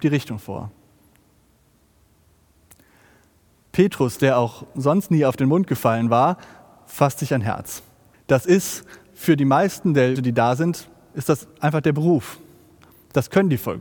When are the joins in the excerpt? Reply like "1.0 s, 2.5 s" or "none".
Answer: 8.1 s, 10.2 s